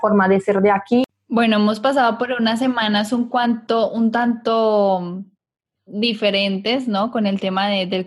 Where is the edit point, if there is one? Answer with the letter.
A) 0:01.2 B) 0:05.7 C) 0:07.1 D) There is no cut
D